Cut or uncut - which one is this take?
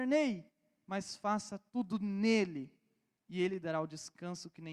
uncut